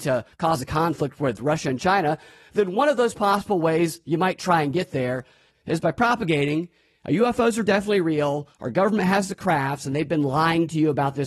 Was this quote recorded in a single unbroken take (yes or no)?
yes